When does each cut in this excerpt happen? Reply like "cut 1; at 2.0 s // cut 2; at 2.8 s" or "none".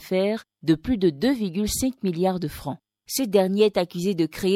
cut 1; at 3.0 s